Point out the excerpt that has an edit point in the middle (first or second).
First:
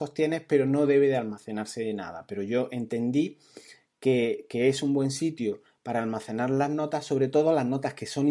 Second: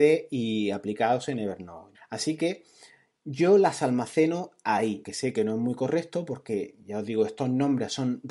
second